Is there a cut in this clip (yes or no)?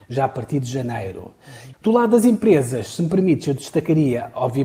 yes